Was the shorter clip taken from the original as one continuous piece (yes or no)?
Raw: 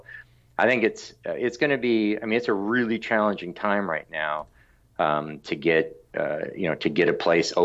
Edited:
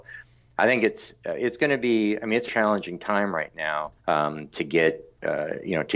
no